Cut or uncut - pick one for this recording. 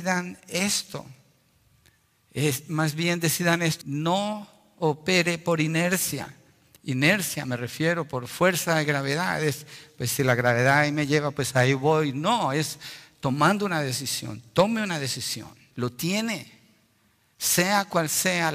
cut